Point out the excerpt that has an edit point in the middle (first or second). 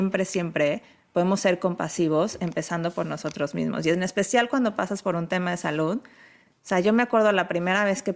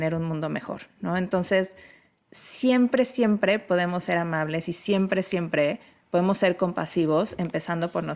first